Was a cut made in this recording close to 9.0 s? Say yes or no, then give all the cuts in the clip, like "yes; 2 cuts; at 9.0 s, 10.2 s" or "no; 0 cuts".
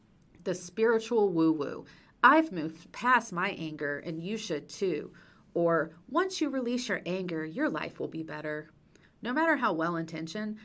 yes; 1 cut; at 9.0 s